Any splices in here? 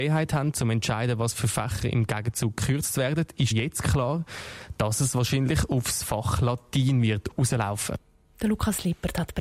yes; 1 cut; at 3.5 s

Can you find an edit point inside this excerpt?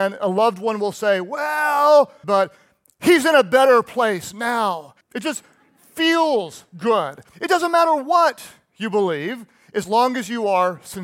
yes; 3 cuts; at 2.2 s, 5.0 s, 7.3 s

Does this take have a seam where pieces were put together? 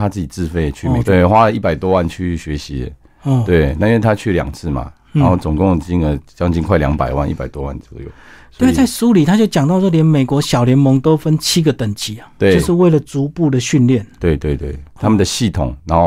yes; 1 cut; at 1.0 s

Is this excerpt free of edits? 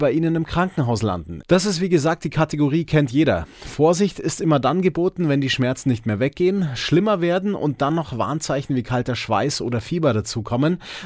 no; 1 cut; at 1.4 s

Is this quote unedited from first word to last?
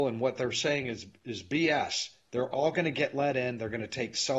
yes; 0 cuts

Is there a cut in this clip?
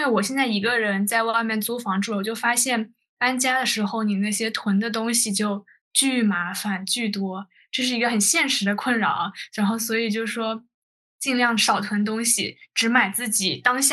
no; 0 cuts

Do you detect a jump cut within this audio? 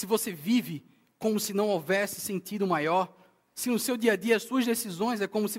no; 0 cuts

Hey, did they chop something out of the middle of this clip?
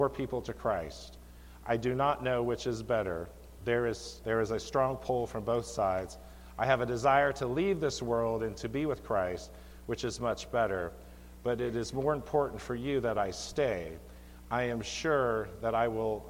yes; 1 cut; at 4.2 s

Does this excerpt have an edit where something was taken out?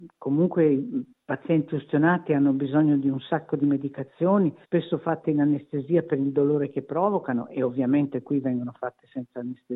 yes; 1 cut; at 4.6 s

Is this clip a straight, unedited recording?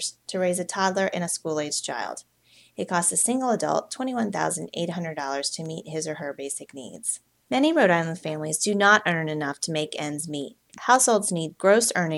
no; 1 cut; at 10.7 s

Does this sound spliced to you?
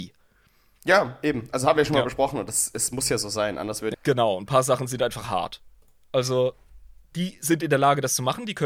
yes; 1 cut; at 3.9 s

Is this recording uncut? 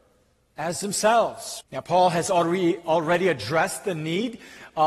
no; 1 cut; at 1.6 s

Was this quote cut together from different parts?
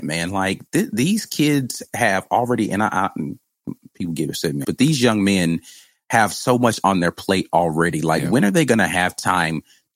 yes; 1 cut; at 4.6 s

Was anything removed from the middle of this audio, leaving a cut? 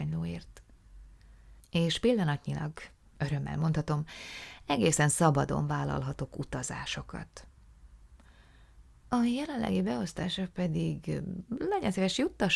no; 0 cuts

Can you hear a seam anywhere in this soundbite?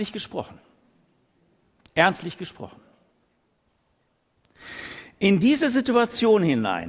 no; 0 cuts

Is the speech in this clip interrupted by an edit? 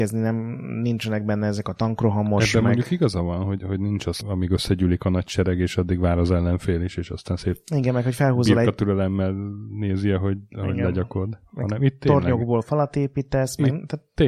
yes; 1 cut; at 4.2 s

